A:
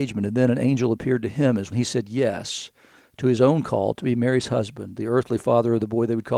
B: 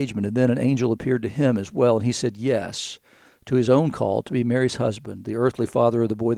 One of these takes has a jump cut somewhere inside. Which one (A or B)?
A